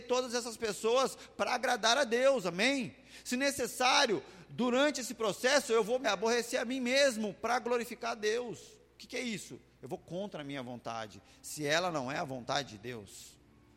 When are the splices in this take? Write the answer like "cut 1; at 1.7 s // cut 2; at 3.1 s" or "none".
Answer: cut 1; at 6.0 s